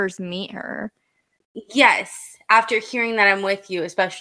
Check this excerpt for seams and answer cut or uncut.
uncut